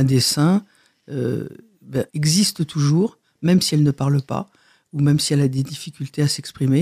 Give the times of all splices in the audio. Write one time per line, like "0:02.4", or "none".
0:02.1